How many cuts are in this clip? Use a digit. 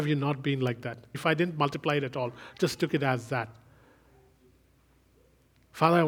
1